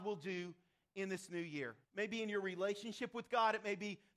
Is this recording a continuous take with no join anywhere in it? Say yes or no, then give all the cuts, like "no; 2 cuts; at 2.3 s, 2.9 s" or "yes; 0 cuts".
no; 1 cut; at 1.8 s